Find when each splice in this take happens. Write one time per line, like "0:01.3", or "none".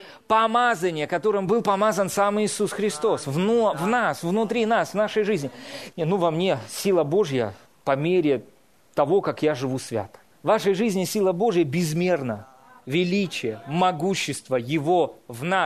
0:05.9
0:07.8
0:10.3